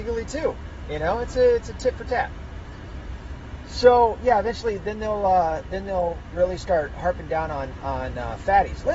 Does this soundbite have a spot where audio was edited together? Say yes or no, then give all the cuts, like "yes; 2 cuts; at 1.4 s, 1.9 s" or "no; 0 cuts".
no; 0 cuts